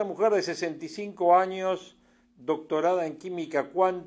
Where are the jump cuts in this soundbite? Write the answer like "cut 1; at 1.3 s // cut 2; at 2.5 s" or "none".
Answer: cut 1; at 2.2 s